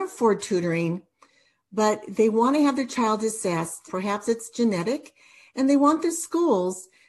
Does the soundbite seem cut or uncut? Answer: cut